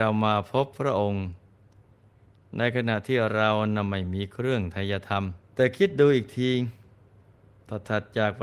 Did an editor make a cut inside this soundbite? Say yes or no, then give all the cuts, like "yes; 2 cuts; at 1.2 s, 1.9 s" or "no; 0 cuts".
yes; 1 cut; at 5.4 s